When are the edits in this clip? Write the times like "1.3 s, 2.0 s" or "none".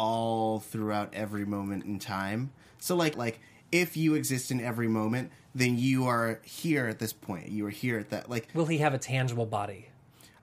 3.1 s